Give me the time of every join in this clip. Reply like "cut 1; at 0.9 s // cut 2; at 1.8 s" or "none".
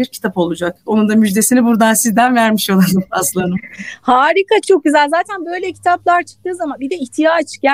cut 1; at 4.6 s